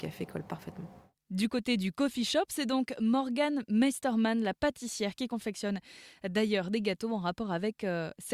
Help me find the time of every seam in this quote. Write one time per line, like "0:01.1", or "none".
none